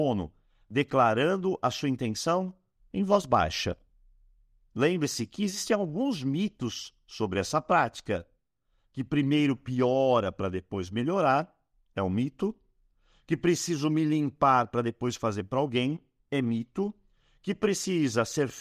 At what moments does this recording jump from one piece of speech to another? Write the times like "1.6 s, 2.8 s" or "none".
4.6 s